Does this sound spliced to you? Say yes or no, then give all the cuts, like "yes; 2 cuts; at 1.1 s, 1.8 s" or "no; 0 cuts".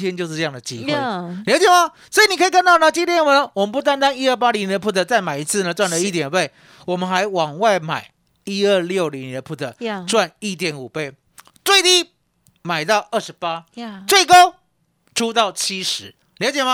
no; 0 cuts